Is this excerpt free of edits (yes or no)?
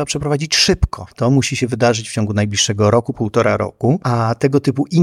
no